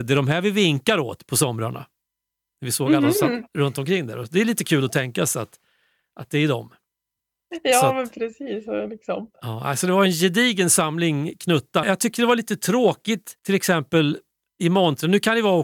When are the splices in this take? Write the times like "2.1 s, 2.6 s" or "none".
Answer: 11.8 s, 13.4 s

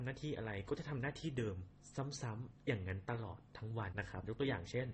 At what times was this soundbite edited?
3.9 s

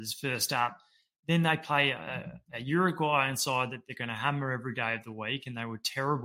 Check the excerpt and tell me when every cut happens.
none

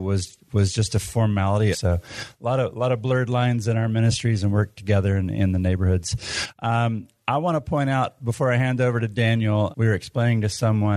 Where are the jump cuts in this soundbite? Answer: 1.7 s, 9.7 s

